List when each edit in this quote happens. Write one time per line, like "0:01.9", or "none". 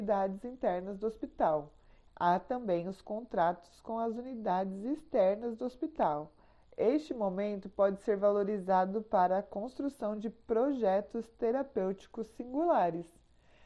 0:02.1
0:06.6